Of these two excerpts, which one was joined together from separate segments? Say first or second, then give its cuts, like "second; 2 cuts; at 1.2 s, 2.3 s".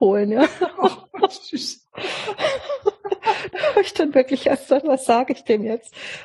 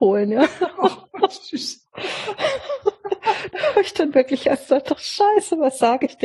first; 1 cut; at 4.8 s